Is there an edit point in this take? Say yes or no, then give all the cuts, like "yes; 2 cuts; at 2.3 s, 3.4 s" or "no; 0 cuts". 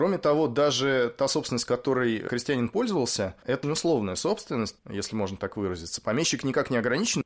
yes; 2 cuts; at 3.6 s, 4.8 s